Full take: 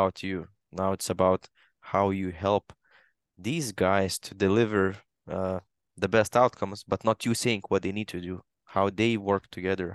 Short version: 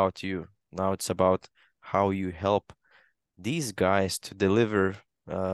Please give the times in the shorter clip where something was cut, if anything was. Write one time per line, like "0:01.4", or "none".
none